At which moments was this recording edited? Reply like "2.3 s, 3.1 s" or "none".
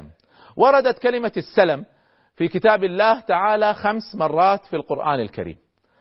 none